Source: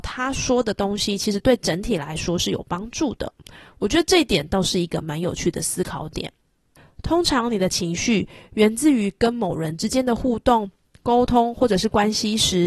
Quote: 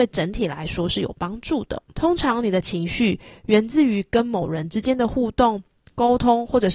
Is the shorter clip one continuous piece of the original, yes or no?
no